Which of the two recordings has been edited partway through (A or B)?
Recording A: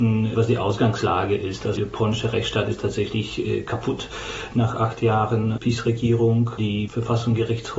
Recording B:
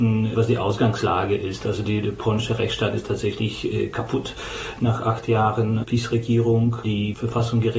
A